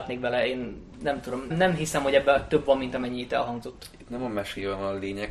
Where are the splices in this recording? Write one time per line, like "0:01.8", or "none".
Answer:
0:01.5

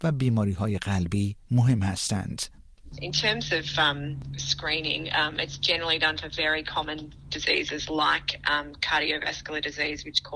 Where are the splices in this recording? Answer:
none

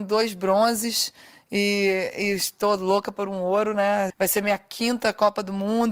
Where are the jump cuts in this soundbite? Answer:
0:04.1

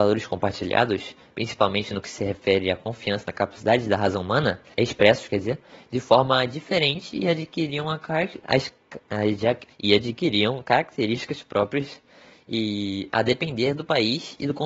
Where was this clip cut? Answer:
0:04.7
0:09.7

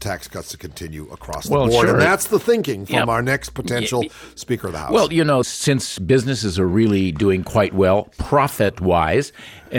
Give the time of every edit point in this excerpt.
0:05.4

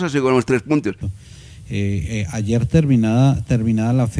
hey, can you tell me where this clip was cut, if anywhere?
0:01.0

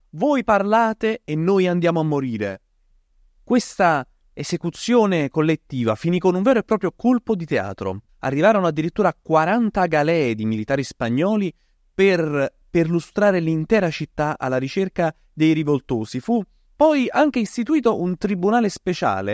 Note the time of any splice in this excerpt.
0:08.1

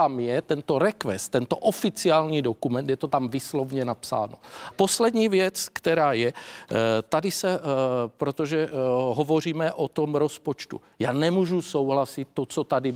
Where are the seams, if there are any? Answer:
0:04.7

